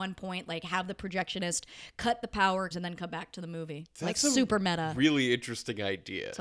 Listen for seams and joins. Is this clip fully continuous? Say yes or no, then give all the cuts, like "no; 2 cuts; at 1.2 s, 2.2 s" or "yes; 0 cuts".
no; 1 cut; at 2.7 s